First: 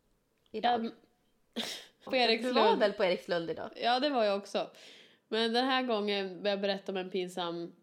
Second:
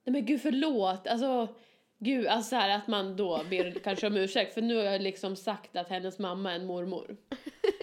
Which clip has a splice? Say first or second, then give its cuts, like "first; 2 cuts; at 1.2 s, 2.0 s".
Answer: first; 1 cut; at 2.1 s